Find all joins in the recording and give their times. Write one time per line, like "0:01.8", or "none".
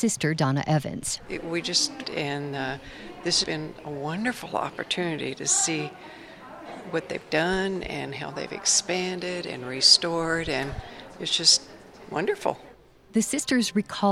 0:02.0
0:03.4